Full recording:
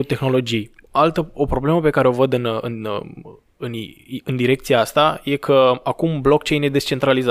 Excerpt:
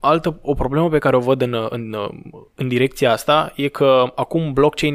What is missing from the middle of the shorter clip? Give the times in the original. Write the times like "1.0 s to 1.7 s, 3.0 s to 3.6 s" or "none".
3.5 s to 4.2 s